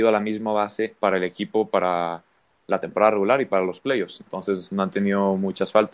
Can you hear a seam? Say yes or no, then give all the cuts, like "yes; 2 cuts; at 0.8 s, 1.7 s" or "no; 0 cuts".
no; 0 cuts